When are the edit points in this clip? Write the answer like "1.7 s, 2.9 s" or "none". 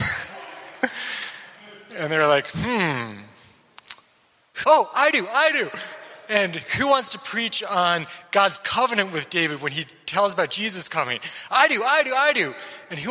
4.6 s

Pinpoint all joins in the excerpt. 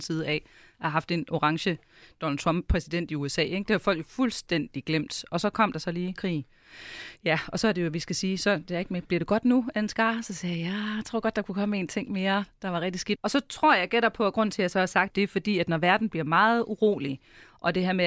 13.2 s, 15.1 s

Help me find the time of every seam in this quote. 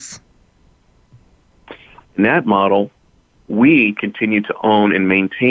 2.0 s

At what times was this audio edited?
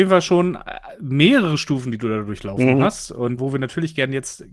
3.4 s

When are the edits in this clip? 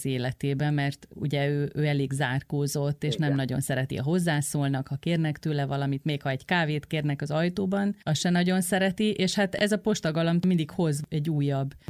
none

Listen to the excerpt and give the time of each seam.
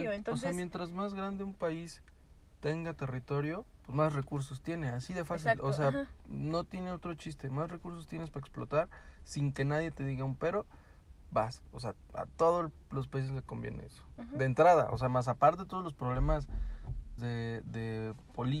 17.2 s

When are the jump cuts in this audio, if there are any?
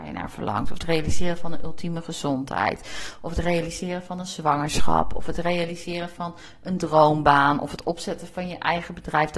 none

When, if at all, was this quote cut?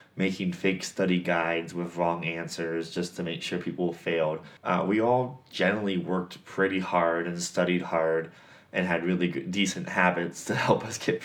4.6 s

